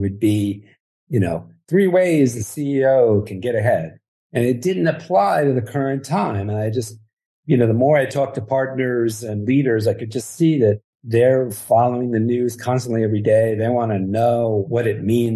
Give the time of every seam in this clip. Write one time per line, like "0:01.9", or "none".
0:10.9